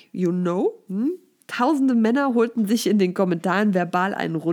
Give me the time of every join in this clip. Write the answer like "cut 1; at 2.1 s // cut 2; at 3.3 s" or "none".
none